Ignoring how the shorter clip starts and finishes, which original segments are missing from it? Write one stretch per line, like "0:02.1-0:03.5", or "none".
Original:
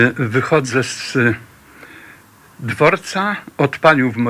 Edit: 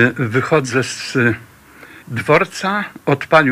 0:02.0-0:02.5